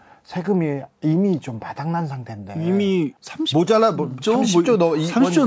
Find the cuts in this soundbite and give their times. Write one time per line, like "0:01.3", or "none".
none